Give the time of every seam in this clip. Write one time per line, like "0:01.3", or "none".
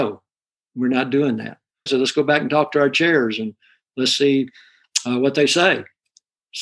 0:01.9